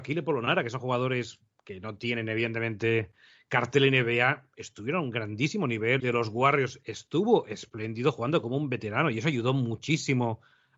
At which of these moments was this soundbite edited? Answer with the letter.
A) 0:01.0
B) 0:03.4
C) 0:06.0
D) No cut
C